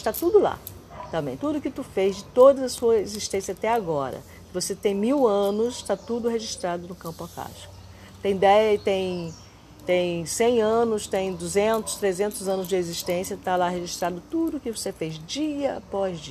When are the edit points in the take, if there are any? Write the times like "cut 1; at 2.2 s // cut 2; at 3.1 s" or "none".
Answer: cut 1; at 1.4 s